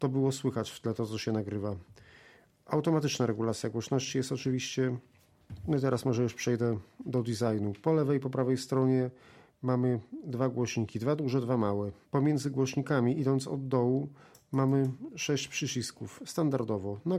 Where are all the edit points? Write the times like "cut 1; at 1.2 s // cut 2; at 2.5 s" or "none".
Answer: cut 1; at 12.0 s

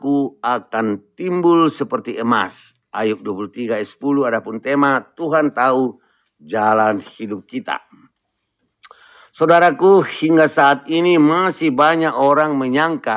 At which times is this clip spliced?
none

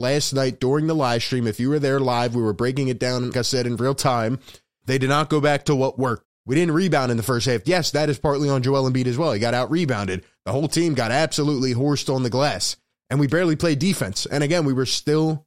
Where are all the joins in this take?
cut 1; at 3.3 s // cut 2; at 4.8 s // cut 3; at 6.2 s

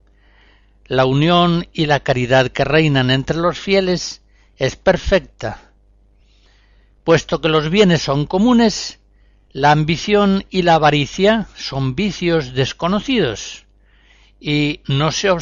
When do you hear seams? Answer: none

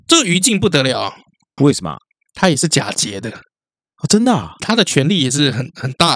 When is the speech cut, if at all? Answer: cut 1; at 1.6 s // cut 2; at 4.6 s

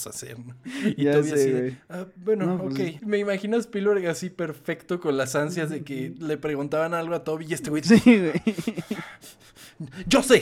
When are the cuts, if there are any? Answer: cut 1; at 3.0 s

